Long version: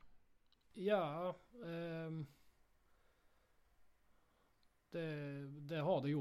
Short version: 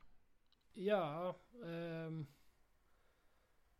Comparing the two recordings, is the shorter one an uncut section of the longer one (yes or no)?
yes